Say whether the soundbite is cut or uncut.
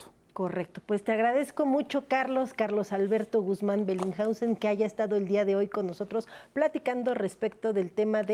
uncut